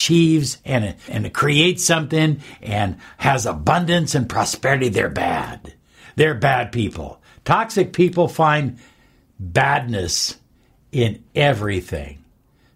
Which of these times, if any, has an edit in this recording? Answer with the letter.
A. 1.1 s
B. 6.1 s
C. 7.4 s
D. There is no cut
A